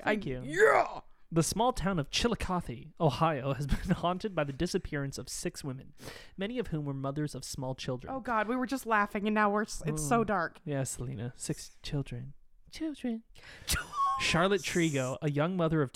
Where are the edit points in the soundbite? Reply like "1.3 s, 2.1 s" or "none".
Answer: none